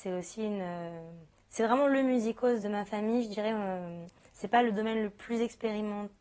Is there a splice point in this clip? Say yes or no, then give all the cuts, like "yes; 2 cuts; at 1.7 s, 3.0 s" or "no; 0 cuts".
yes; 1 cut; at 2.6 s